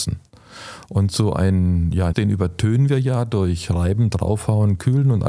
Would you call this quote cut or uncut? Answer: cut